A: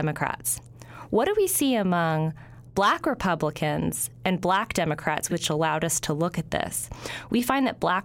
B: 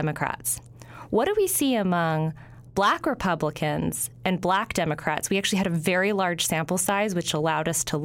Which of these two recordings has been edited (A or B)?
A